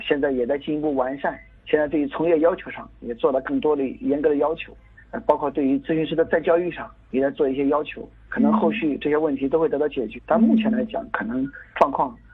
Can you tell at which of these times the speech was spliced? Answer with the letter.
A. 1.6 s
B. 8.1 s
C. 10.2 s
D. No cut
C